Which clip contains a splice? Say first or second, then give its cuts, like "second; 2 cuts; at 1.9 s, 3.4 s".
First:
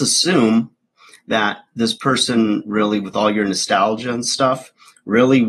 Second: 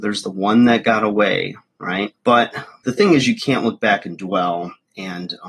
second; 1 cut; at 2.1 s